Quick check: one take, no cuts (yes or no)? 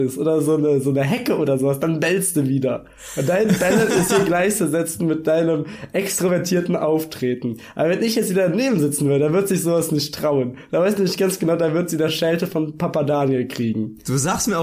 yes